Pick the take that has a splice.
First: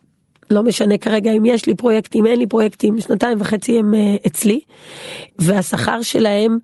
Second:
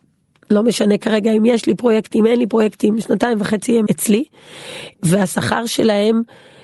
second; 1 cut; at 3.9 s

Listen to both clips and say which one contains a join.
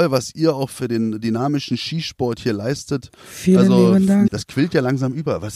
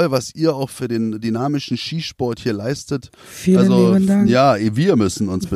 first; 1 cut; at 4.3 s

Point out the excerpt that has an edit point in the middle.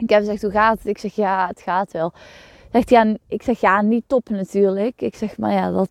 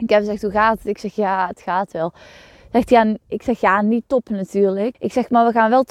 second; 1 cut; at 4.9 s

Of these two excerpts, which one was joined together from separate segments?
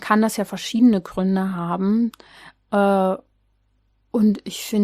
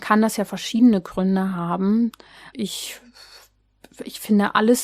second; 1 cut; at 2.5 s

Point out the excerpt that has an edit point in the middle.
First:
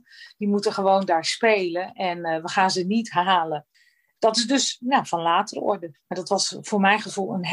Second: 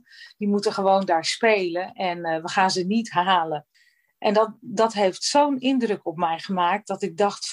first; 2 cuts; at 4.2 s, 5.9 s

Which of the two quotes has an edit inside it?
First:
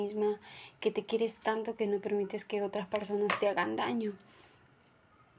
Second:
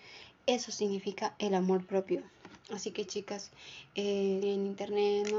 second; 2 cuts; at 2.6 s, 4.4 s

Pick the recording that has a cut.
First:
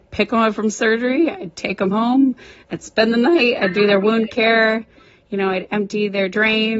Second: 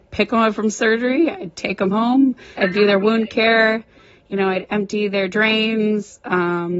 second; 1 cut; at 2.6 s

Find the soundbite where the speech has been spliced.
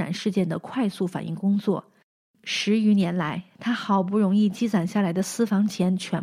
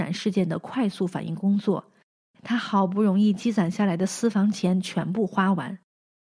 second; 1 cut; at 2.3 s

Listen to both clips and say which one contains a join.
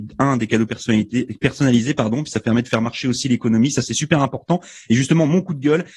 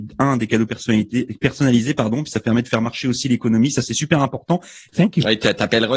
second; 1 cut; at 4.9 s

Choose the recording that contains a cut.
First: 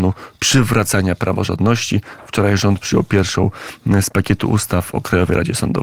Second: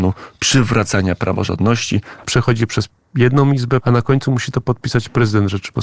second; 2 cuts; at 2.2 s, 3.8 s

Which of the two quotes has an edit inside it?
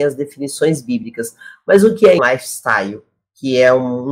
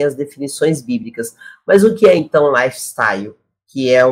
first; 1 cut; at 2.2 s

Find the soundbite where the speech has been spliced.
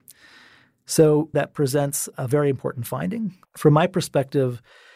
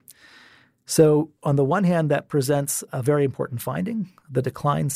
first; 2 cuts; at 1.3 s, 3.4 s

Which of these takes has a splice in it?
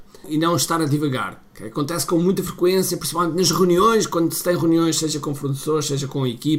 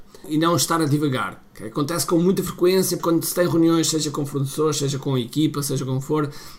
second; 1 cut; at 3.0 s

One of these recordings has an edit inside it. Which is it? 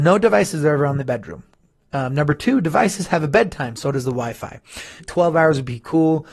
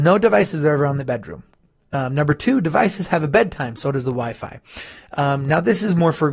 first; 1 cut; at 5.0 s

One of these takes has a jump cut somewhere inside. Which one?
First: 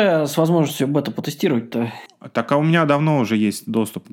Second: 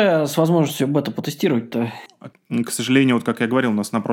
second; 1 cut; at 2.3 s

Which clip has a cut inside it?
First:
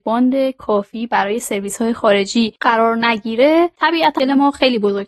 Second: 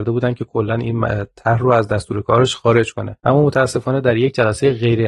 first; 1 cut; at 4.2 s

